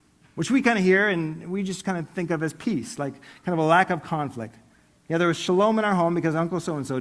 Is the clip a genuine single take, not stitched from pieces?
yes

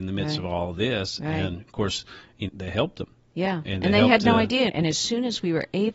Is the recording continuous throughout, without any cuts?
no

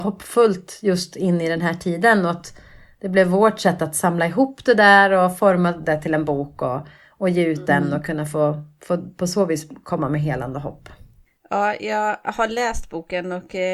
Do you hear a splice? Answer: no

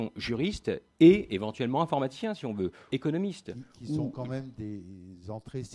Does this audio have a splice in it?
yes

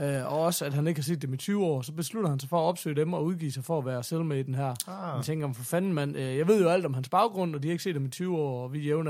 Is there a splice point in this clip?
no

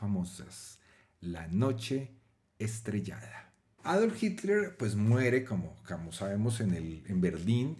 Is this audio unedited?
no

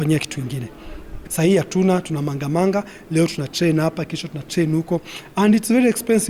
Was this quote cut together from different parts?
yes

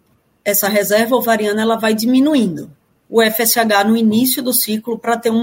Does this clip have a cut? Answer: yes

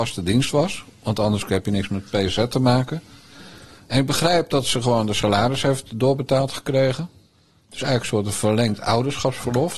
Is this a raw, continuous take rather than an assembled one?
yes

